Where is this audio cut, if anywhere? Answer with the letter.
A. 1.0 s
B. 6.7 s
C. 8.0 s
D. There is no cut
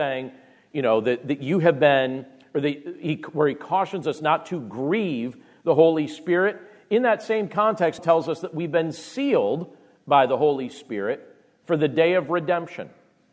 C